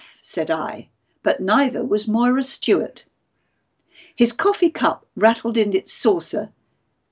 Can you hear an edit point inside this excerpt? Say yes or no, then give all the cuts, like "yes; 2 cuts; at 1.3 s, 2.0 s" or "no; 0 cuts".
no; 0 cuts